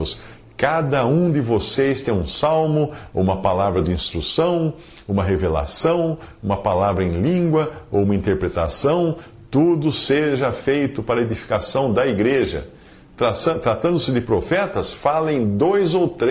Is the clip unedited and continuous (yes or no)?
yes